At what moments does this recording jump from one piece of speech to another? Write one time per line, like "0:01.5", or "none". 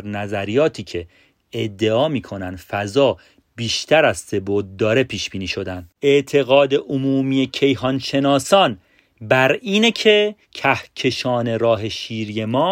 0:06.0
0:10.4